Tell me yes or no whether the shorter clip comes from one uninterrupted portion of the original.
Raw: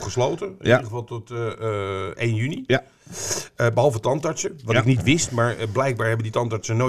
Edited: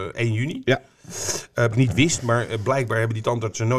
no